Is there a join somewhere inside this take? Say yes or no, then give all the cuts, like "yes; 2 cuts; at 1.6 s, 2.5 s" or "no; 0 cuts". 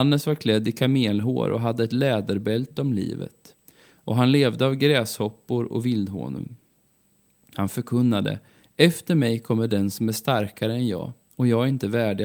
no; 0 cuts